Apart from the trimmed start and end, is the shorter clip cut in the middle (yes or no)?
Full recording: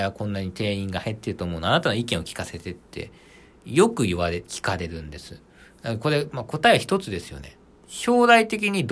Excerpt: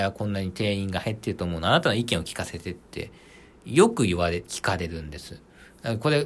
no